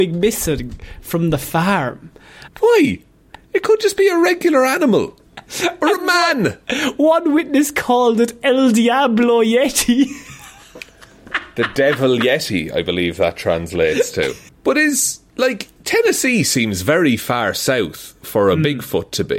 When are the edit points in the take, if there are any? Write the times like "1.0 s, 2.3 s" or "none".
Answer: 2.5 s, 14.5 s, 15.8 s